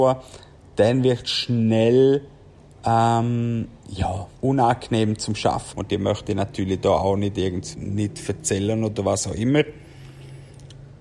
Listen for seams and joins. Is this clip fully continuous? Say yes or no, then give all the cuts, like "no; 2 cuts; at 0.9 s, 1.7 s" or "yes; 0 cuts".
no; 3 cuts; at 4.4 s, 5.7 s, 7.7 s